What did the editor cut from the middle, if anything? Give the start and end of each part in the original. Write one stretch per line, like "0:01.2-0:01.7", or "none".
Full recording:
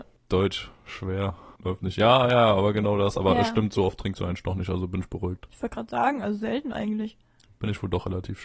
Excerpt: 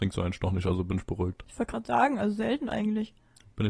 none